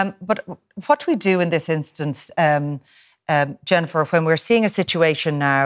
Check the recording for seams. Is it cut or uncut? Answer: uncut